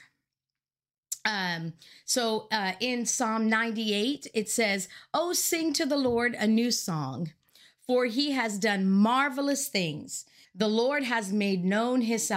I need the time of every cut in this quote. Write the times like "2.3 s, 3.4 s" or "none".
10.4 s